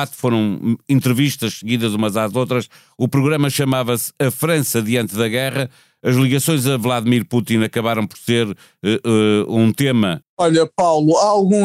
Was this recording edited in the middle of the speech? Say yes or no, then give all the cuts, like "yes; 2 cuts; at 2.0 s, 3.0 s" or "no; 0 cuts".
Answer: yes; 1 cut; at 10.2 s